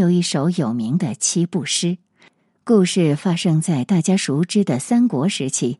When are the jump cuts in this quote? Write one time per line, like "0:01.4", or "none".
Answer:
none

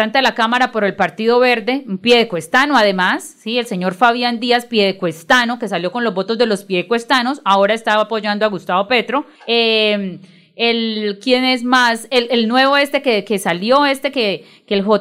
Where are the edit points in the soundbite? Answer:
0:09.4

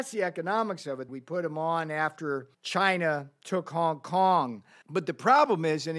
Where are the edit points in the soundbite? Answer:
0:01.1
0:02.5
0:04.8

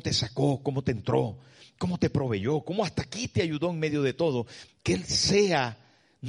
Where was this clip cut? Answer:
0:04.7

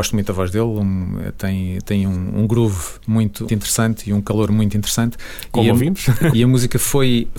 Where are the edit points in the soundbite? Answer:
0:03.5
0:06.3

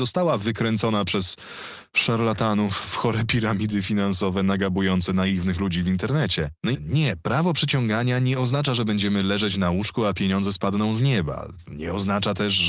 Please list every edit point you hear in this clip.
0:06.7

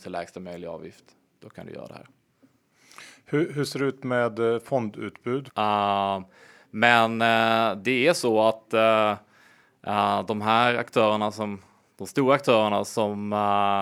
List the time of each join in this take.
0:05.5

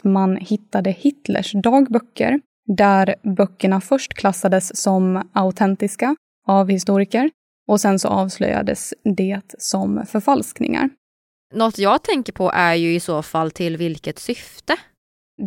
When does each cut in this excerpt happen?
none

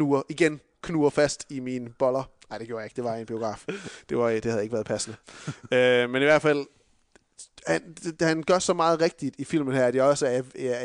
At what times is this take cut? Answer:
none

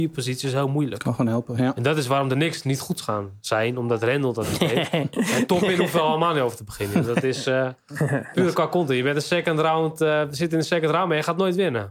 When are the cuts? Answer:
none

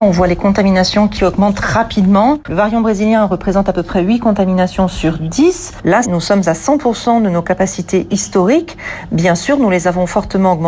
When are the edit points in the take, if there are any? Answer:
0:06.0

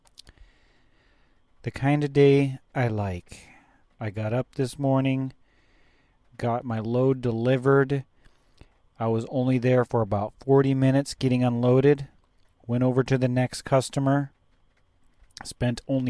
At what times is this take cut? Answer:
none

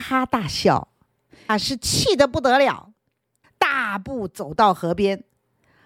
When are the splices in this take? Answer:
0:01.5
0:03.4

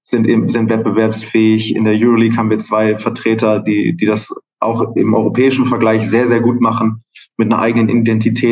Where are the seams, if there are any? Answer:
none

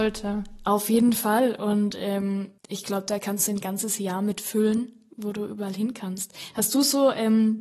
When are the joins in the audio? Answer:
0:02.6

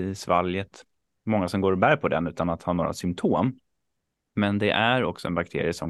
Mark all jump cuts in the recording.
none

